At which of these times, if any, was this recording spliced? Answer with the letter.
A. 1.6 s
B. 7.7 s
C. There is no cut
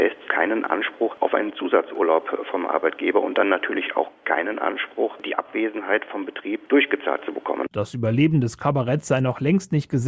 B